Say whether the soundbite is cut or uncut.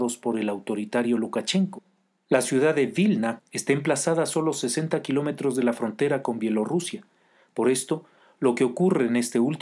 cut